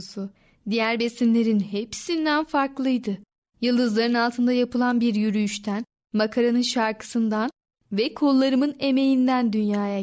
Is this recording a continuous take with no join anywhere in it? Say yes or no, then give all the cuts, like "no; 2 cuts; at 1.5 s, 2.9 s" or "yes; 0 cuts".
yes; 0 cuts